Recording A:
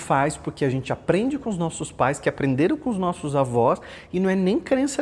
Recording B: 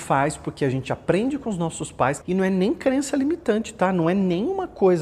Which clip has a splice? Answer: B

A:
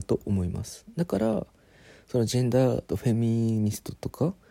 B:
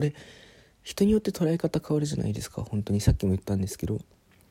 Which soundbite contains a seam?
A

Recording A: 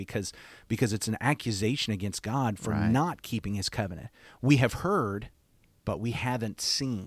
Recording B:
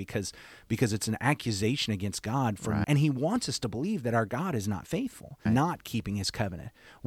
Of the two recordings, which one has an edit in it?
B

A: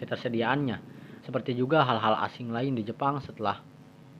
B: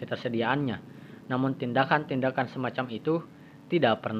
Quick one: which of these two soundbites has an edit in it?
A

